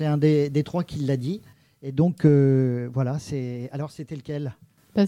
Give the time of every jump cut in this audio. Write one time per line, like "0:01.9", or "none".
none